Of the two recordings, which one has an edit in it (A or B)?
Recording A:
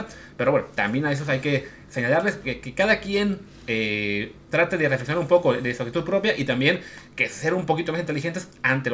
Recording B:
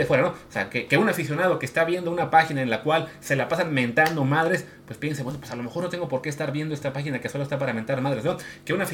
A